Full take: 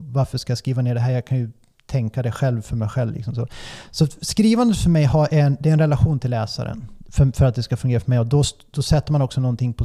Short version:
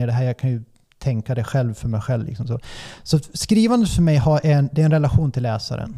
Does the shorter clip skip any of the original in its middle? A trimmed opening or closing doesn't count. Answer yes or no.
no